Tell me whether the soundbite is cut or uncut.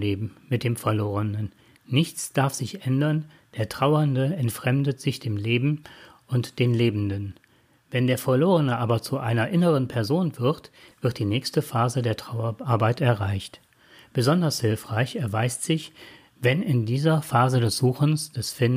cut